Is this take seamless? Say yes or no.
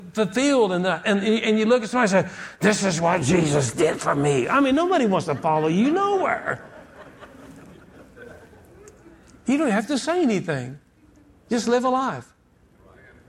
yes